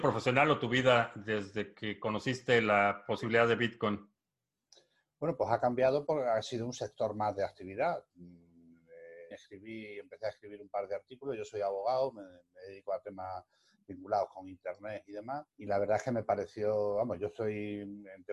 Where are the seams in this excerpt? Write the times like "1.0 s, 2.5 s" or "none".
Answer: 9.3 s, 15.5 s